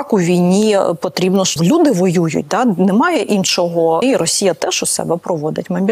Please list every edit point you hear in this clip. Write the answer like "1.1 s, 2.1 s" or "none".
1.6 s, 4.0 s